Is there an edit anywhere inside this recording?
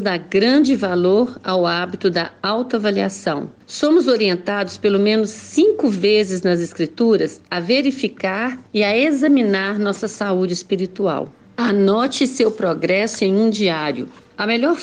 no; 0 cuts

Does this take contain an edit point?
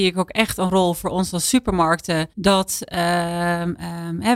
yes; 1 cut; at 2.3 s

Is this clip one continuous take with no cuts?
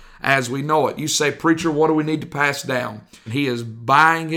no; 1 cut; at 3.3 s

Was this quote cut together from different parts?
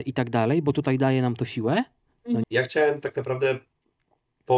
yes; 1 cut; at 2.4 s

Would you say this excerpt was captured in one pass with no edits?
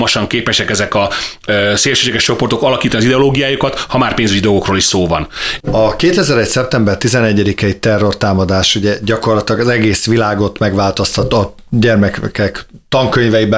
no; 2 cuts; at 5.6 s, 11.3 s

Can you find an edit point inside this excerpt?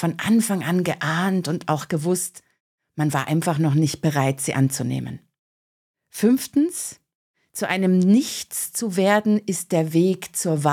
no; 0 cuts

